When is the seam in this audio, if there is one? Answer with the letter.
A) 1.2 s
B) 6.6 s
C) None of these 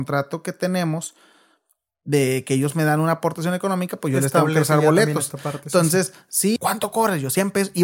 B